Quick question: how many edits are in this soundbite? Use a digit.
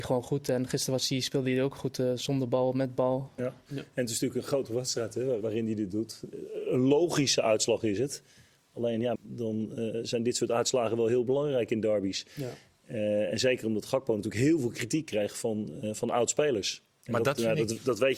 3